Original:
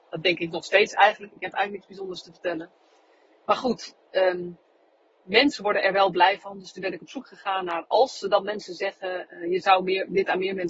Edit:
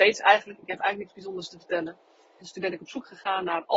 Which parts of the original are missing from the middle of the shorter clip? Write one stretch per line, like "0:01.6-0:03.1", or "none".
0:03.1-0:06.6